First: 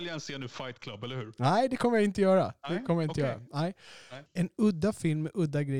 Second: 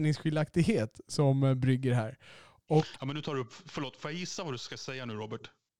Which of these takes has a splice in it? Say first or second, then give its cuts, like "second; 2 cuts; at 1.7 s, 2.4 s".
first; 1 cut; at 4.3 s